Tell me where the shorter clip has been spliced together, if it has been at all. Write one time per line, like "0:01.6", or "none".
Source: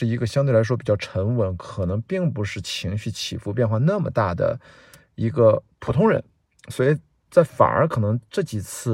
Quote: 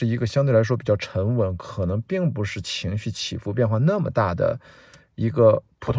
none